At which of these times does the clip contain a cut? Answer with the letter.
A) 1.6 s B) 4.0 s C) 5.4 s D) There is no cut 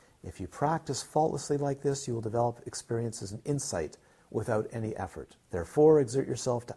C